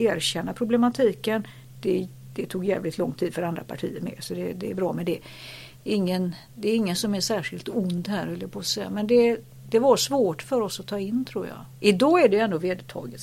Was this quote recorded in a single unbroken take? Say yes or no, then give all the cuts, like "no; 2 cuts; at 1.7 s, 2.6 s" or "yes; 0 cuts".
yes; 0 cuts